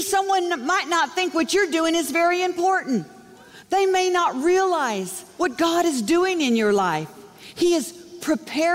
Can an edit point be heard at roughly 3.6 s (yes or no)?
yes